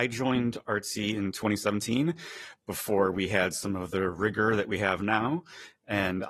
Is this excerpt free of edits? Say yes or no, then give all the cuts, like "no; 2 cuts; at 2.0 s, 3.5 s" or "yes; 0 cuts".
yes; 0 cuts